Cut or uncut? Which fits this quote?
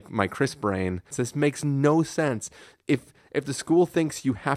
cut